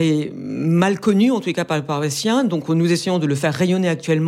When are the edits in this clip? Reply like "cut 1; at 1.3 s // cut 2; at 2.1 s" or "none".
none